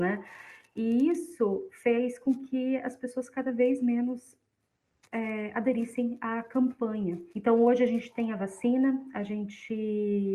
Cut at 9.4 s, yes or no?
no